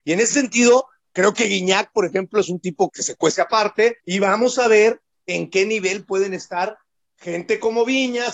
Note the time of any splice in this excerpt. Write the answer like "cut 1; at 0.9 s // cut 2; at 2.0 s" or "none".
cut 1; at 2.9 s // cut 2; at 4.0 s

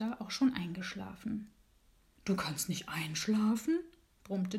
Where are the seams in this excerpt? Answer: cut 1; at 2.2 s

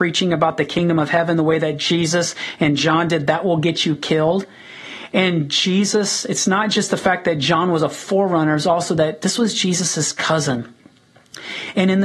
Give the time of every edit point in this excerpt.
none

